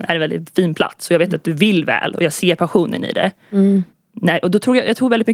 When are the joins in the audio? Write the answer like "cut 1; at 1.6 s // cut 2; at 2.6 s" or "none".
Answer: none